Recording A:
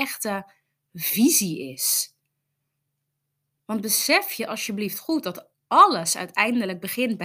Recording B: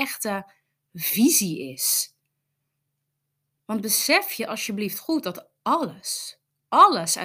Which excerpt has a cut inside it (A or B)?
A